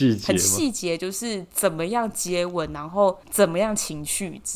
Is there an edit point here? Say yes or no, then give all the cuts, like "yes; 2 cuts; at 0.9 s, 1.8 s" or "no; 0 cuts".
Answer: yes; 1 cut; at 3.2 s